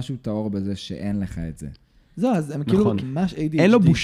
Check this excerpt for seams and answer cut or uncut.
cut